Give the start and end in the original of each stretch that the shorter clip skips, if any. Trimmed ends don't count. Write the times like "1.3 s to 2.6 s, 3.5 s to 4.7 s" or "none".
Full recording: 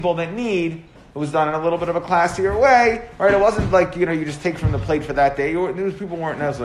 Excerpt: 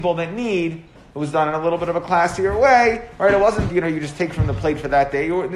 3.7 s to 3.9 s